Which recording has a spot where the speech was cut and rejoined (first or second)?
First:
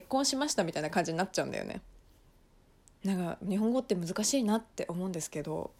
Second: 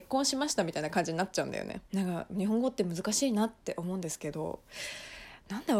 second